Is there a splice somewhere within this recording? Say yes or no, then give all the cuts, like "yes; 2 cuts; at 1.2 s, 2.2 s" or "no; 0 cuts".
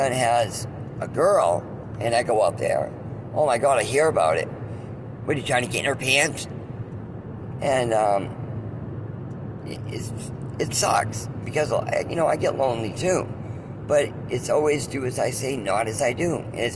yes; 1 cut; at 7.6 s